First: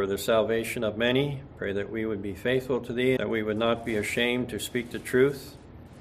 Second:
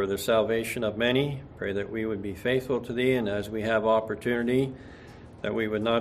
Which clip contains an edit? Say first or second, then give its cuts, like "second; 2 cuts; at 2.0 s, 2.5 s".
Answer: first; 1 cut; at 3.2 s